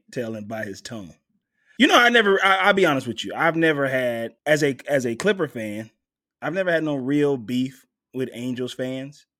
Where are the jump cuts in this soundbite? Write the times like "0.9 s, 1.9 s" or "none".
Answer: 1.8 s, 4.4 s